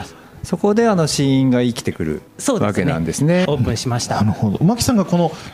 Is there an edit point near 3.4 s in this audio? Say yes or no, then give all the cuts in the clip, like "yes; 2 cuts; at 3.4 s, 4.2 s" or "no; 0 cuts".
yes; 1 cut; at 3.4 s